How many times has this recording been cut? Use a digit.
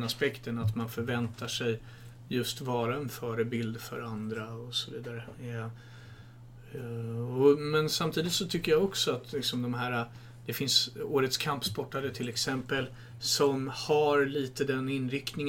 0